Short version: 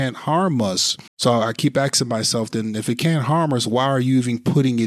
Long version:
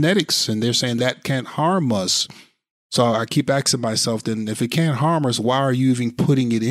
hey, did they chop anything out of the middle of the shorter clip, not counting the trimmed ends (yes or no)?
yes